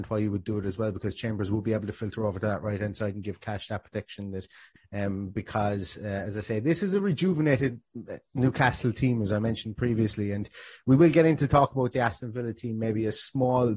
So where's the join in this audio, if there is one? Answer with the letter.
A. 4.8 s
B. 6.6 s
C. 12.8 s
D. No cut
A